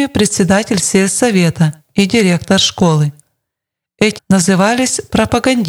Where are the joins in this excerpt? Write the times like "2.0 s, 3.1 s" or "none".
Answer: 4.2 s